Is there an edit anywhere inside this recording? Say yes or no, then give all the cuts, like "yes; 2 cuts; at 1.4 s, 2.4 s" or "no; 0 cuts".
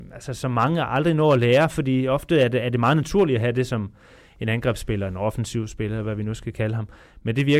no; 0 cuts